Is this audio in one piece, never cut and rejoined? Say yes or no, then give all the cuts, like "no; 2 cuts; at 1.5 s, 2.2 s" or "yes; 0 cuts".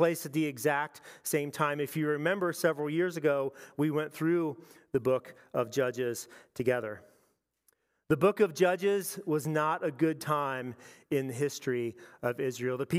yes; 0 cuts